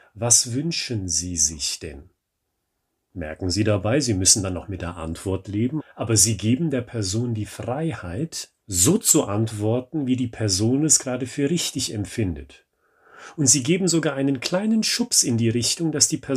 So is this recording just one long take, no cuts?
no; 2 cuts; at 5.8 s, 8.6 s

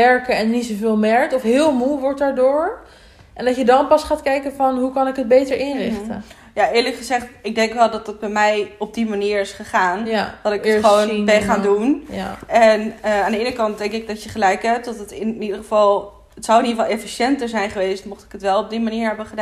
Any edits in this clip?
no; 0 cuts

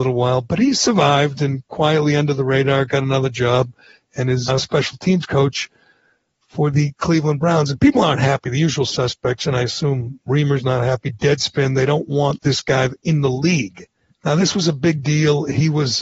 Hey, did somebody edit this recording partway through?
yes; 2 cuts; at 4.5 s, 14.1 s

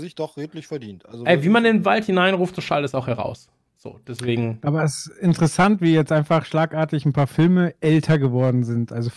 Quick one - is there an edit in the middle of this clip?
no; 0 cuts

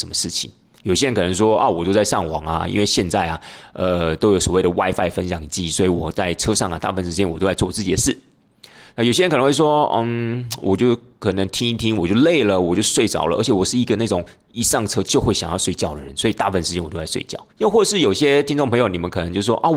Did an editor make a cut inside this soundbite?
yes; 1 cut; at 17.5 s

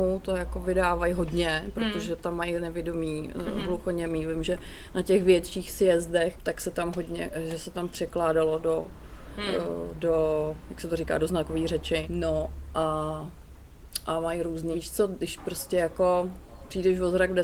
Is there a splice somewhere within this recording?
yes; 3 cuts; at 6.3 s, 12.0 s, 14.7 s

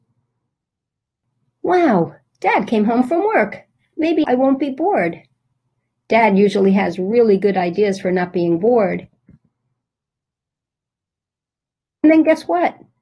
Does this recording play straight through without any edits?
no; 1 cut; at 4.2 s

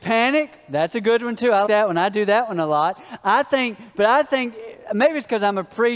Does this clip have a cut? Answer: yes; 1 cut; at 1.7 s

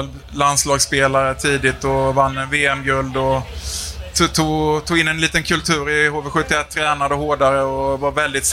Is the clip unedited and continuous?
yes; 0 cuts

